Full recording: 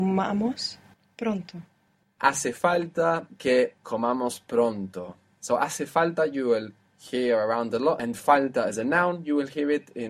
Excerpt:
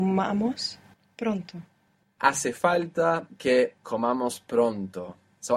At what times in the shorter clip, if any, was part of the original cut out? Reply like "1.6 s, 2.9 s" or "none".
none